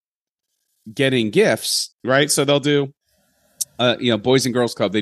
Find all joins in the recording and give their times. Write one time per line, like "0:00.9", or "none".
0:01.9